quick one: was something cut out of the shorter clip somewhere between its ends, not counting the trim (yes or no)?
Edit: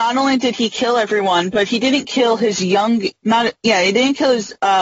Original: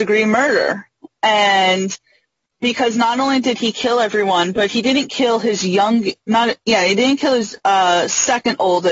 no